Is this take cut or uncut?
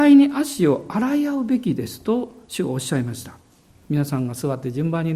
cut